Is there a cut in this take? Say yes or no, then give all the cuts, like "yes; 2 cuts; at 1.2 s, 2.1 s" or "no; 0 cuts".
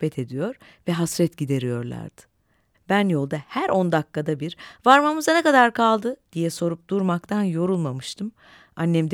yes; 1 cut; at 2.7 s